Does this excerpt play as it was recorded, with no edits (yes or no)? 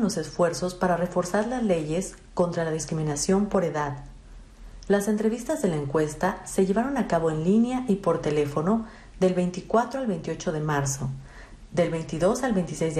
yes